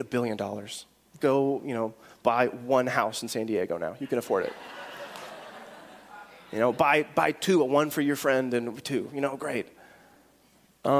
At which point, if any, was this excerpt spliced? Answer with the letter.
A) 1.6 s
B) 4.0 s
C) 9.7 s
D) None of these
D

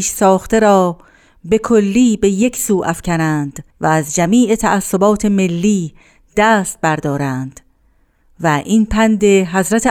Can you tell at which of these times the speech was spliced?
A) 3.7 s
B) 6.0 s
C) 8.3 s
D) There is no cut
A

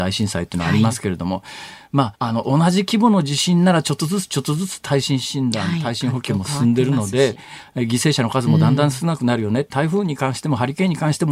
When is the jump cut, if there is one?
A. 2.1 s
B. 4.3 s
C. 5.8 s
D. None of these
A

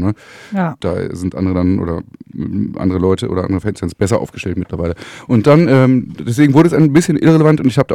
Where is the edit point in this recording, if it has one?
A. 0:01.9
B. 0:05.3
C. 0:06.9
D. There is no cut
D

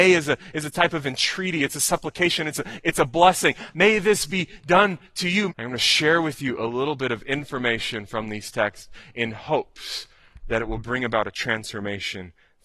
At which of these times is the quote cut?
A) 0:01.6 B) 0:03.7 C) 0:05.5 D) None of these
C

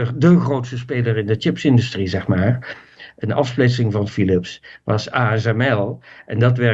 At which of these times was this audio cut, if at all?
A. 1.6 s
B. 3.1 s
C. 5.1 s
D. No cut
B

